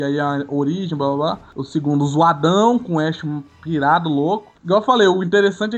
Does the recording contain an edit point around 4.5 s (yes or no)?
yes